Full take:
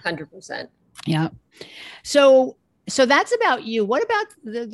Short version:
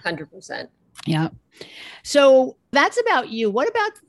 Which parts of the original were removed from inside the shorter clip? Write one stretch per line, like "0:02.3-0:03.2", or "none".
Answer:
0:02.7-0:03.1